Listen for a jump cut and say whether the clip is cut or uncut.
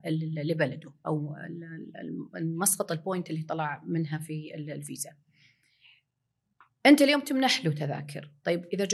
uncut